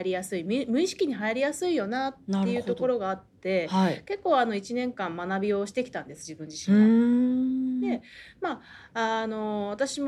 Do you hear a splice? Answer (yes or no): no